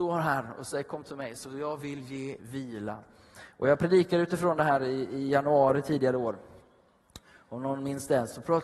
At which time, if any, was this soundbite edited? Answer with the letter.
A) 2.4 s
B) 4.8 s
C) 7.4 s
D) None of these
A